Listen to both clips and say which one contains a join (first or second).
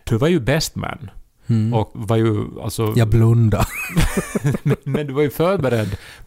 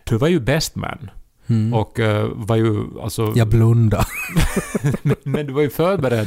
first